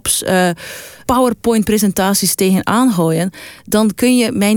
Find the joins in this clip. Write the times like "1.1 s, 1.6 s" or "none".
1.0 s

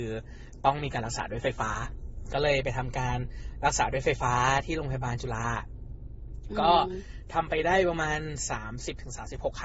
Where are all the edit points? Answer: none

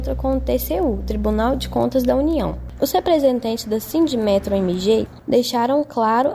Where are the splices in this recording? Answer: 2.8 s

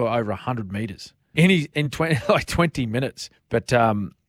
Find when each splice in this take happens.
1.3 s, 3.3 s

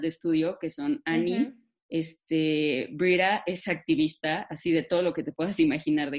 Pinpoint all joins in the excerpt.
1.8 s

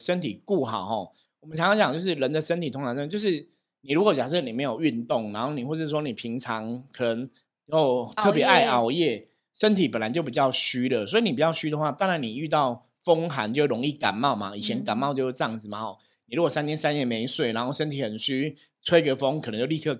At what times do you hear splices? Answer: none

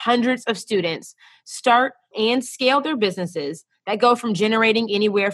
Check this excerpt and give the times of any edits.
2.1 s

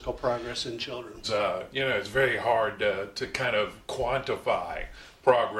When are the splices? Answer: 1.2 s

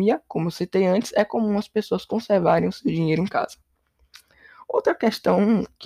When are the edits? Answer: none

